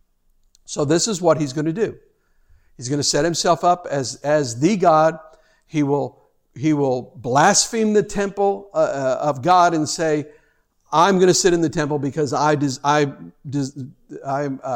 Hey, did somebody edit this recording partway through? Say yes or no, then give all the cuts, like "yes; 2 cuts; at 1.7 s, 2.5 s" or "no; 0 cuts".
no; 0 cuts